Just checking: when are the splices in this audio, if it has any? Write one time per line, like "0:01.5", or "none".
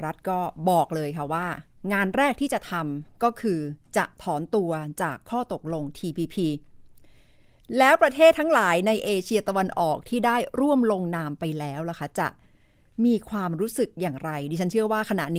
none

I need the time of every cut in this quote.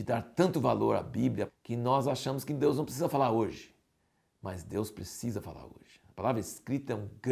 0:01.5

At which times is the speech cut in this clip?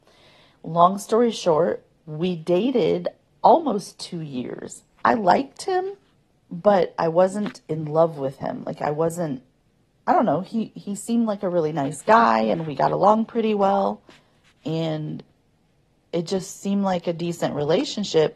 0:05.0

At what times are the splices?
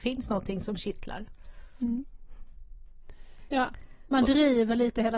0:03.4

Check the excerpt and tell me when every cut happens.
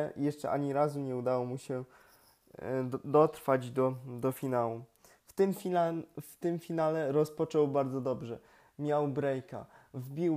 none

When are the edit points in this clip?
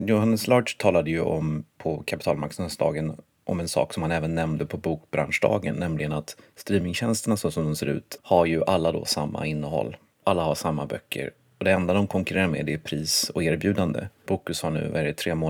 0:08.2
0:14.3

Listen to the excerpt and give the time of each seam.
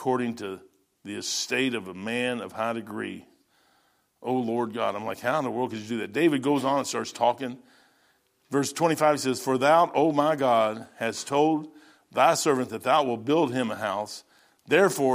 none

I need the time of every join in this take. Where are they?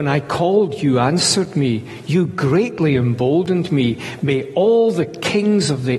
none

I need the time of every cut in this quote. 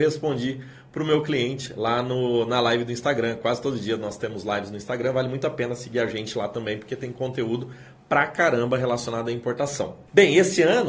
none

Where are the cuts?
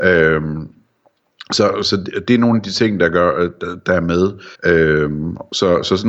0:04.5

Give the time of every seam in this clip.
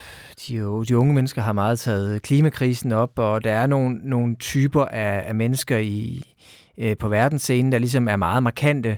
none

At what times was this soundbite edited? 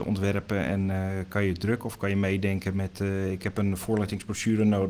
none

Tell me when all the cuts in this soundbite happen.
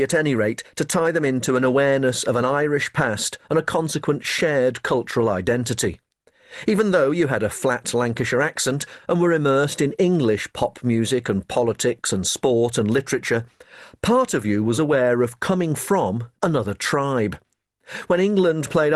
0:14.8
0:16.3

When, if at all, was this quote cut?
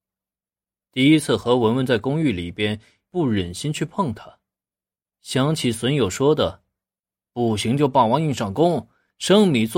0:03.1

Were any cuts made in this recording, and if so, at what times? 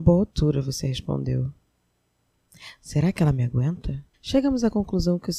0:04.1

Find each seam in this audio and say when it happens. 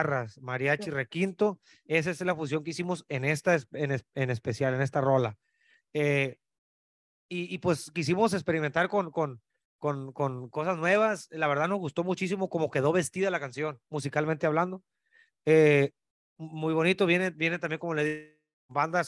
none

